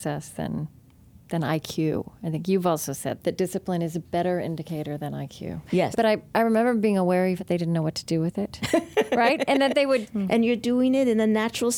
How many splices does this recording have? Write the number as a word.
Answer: three